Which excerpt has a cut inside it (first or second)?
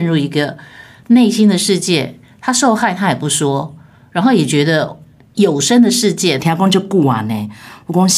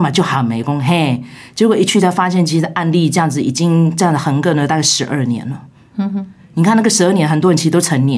first